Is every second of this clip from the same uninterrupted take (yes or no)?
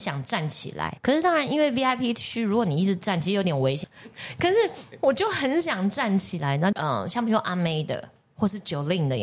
no